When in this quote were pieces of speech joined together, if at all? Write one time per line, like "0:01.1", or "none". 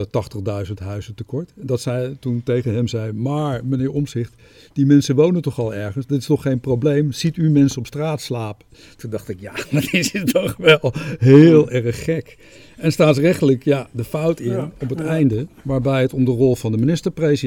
none